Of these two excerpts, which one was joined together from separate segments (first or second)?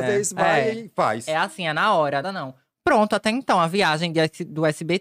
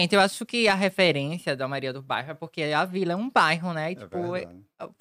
first